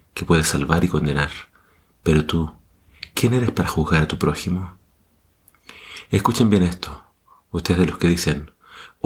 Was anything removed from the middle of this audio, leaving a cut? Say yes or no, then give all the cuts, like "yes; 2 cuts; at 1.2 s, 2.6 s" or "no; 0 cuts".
no; 0 cuts